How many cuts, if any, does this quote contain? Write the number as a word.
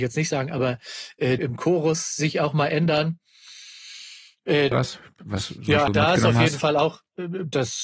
three